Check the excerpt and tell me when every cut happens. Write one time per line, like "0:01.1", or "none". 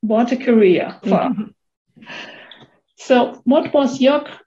0:01.0